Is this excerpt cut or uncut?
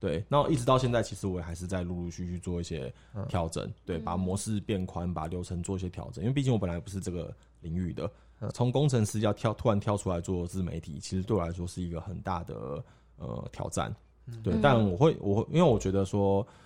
cut